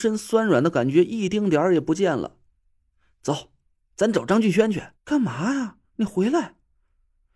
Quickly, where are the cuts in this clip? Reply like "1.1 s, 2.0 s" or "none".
5.0 s